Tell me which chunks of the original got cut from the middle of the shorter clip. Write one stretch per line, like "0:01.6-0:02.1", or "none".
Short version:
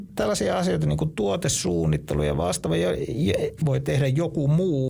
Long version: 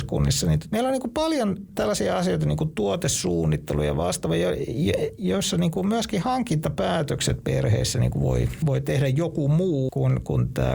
0:05.2-0:08.6